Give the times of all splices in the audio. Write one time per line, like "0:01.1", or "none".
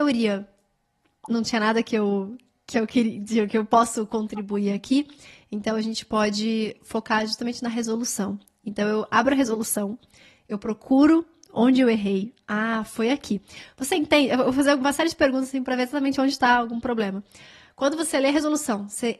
none